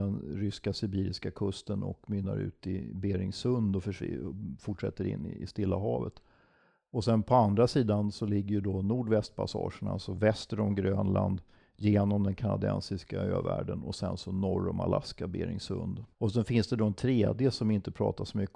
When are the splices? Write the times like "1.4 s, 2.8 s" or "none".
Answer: 16.1 s